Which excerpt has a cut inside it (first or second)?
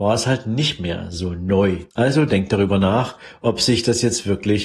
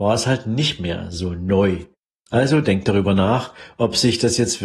first